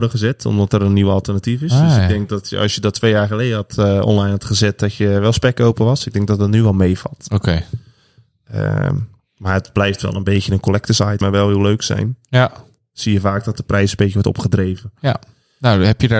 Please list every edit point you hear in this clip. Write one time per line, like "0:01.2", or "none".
0:11.2